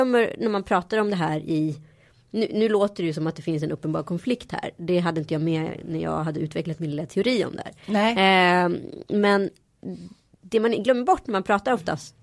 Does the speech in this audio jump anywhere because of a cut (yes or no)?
no